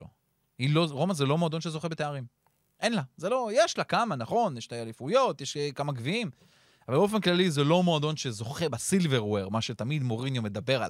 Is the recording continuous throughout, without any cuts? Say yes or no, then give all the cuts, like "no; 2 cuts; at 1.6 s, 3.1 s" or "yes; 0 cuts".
yes; 0 cuts